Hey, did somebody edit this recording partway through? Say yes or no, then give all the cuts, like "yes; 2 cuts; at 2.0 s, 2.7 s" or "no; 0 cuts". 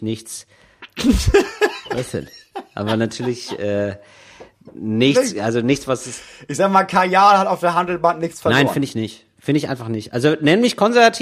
no; 0 cuts